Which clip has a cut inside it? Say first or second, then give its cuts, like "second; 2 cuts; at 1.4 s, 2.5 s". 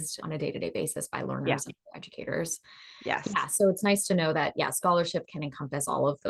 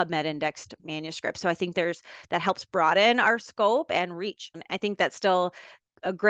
second; 1 cut; at 4.5 s